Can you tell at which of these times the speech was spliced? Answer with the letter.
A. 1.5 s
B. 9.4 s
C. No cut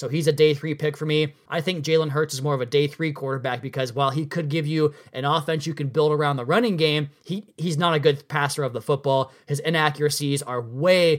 A